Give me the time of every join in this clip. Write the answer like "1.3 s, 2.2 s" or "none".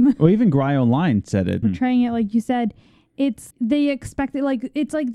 1.6 s, 3.5 s

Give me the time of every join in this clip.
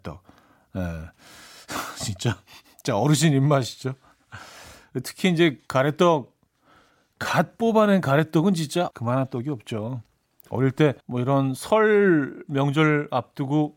8.9 s, 11.0 s

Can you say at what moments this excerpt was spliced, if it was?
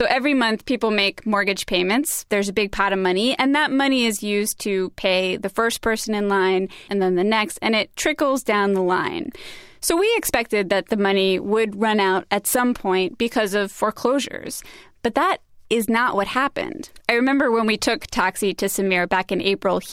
6.9 s, 17.0 s

